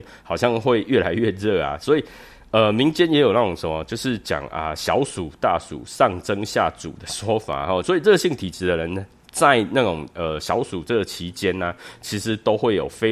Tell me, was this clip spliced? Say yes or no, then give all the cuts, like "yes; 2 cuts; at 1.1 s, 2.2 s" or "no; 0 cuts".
yes; 1 cut; at 7.8 s